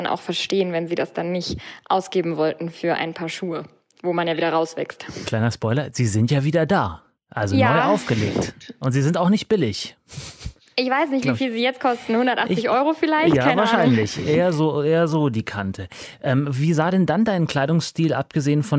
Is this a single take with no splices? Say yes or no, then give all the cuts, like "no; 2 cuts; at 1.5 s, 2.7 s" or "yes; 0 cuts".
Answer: yes; 0 cuts